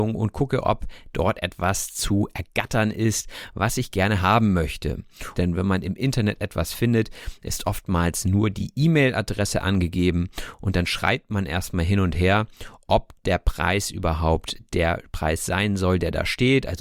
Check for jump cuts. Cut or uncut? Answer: cut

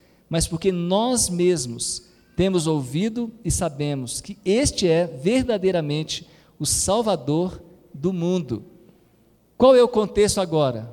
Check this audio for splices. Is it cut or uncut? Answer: uncut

